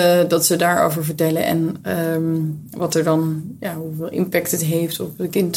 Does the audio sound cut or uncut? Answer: uncut